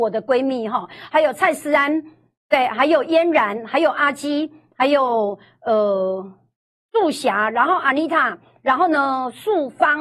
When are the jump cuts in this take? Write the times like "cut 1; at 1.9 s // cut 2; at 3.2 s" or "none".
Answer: cut 1; at 6.9 s

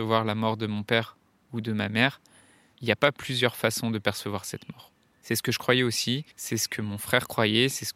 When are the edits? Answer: cut 1; at 2.7 s // cut 2; at 6.3 s

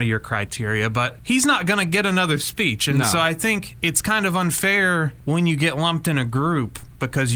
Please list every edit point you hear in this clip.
none

